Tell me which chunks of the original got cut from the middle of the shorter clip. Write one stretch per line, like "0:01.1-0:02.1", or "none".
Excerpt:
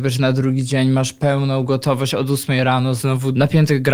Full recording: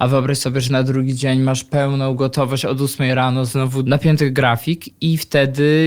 none